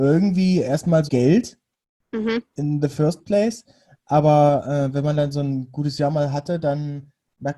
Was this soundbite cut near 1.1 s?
yes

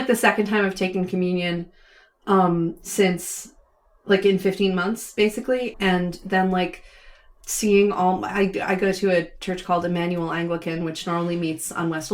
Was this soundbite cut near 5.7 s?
yes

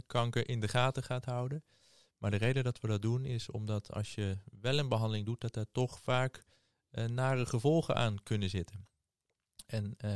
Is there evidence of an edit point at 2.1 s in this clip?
no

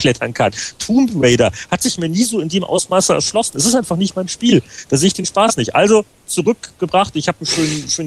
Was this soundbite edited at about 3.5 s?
no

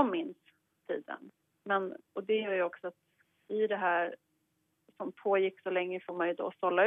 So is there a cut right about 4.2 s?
no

